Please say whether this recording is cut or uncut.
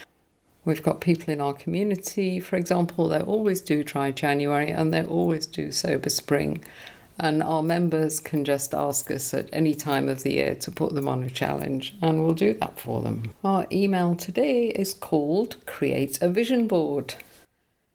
cut